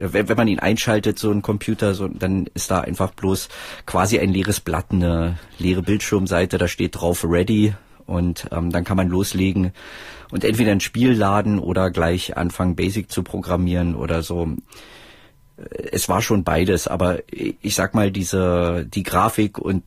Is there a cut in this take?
no; 0 cuts

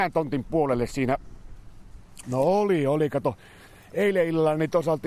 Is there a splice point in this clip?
yes; 1 cut; at 2.2 s

